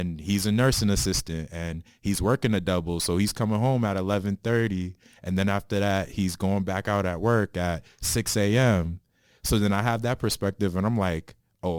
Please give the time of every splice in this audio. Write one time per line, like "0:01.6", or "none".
none